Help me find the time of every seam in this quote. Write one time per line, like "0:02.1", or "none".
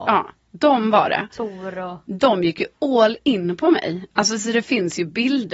none